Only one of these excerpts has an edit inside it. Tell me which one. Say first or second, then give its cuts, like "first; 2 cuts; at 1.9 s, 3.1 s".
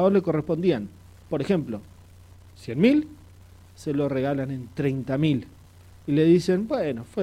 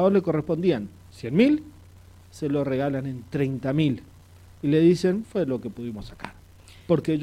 second; 2 cuts; at 1.1 s, 5.2 s